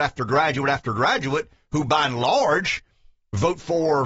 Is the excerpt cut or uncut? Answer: uncut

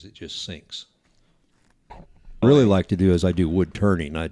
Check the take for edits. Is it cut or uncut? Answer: cut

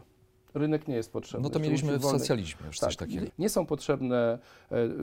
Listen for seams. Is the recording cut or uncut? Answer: cut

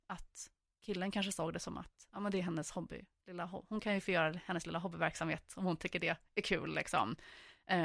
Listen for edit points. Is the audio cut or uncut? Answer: uncut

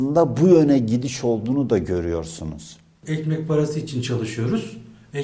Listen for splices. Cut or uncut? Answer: uncut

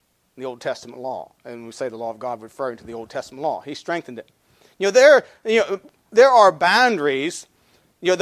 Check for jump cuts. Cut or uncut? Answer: uncut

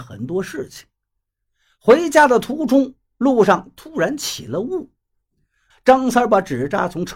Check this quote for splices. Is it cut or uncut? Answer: cut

